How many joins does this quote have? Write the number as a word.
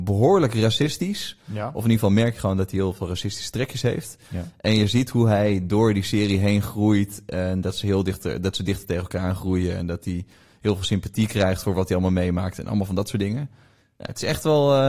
zero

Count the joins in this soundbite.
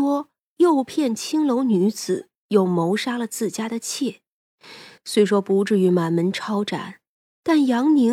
zero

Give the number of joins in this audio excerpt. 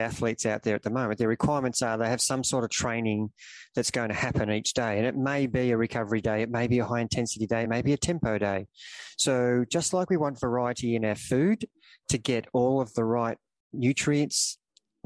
one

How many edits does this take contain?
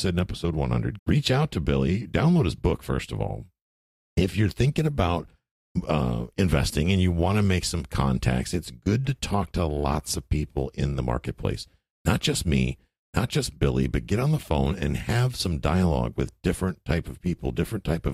one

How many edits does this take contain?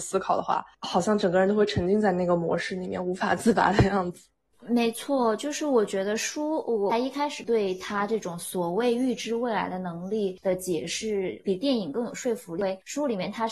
zero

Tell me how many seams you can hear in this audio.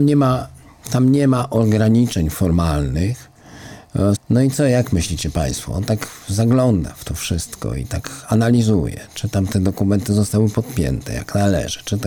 one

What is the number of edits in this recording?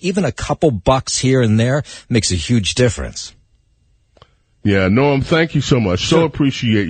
zero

